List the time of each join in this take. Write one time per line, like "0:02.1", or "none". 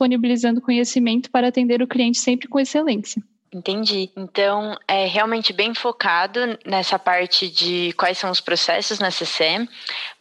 none